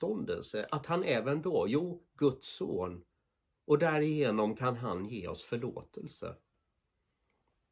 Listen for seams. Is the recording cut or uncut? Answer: uncut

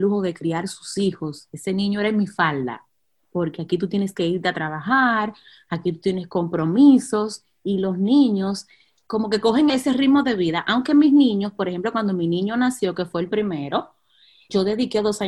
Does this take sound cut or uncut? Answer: cut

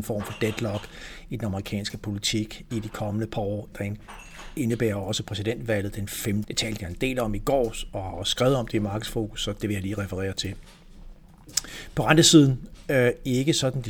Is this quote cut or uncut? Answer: cut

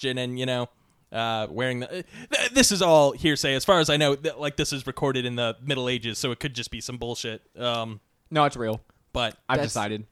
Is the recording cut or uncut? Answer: uncut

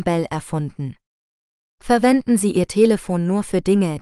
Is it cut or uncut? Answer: cut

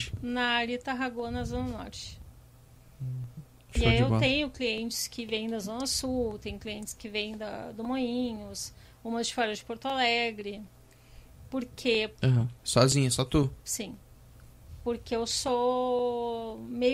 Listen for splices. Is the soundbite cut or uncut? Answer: cut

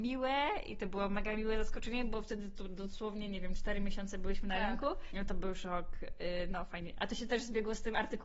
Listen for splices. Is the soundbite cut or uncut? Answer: cut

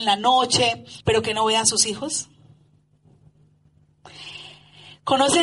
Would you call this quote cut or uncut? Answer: cut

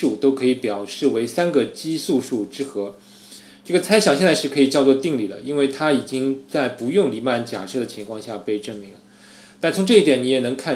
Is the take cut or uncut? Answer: uncut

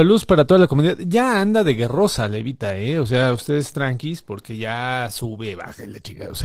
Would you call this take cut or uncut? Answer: uncut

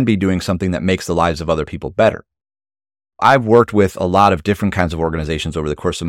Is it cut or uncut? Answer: uncut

